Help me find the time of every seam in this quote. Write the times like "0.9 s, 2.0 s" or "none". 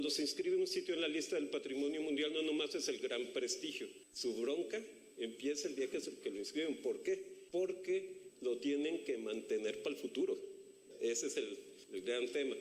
4.1 s